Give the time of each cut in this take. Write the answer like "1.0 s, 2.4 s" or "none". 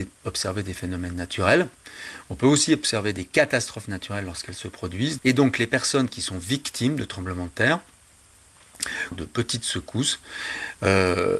5.2 s, 9.1 s